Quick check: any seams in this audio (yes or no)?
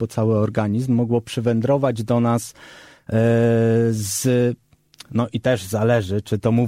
no